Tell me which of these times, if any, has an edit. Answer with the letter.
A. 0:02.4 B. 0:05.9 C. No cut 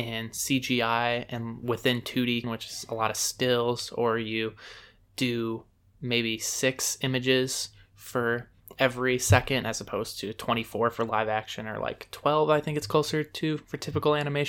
A